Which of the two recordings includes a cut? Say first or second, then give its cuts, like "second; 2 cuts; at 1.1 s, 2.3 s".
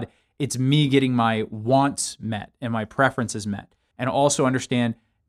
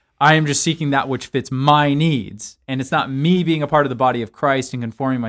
first; 1 cut; at 3.9 s